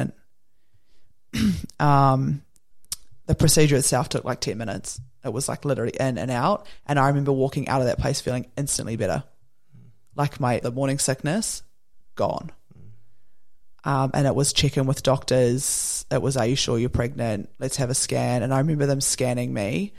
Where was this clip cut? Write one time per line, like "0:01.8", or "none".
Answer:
0:10.6
0:13.8